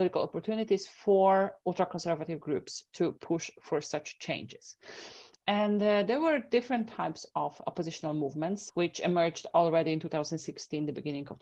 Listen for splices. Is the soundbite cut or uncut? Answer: cut